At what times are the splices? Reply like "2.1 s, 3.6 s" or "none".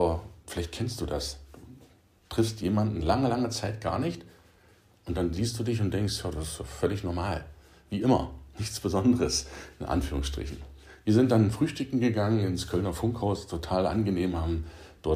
none